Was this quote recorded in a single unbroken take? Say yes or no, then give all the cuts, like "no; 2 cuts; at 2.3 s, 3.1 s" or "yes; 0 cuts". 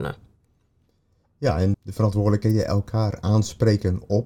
no; 1 cut; at 1.7 s